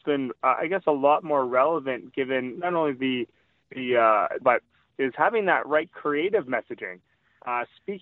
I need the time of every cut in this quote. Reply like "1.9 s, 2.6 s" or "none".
4.4 s